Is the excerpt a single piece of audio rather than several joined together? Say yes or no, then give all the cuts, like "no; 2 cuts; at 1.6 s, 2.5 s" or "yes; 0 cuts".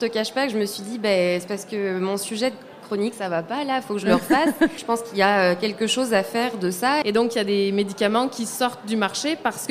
no; 2 cuts; at 4.8 s, 7.0 s